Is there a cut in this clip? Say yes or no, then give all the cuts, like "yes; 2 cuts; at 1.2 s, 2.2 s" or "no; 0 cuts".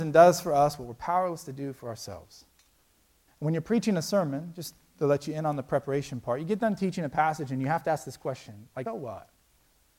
yes; 2 cuts; at 3.3 s, 8.9 s